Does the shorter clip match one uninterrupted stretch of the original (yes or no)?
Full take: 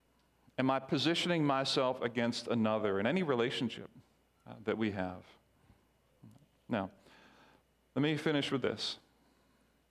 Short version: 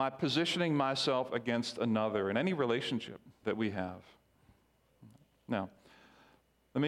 no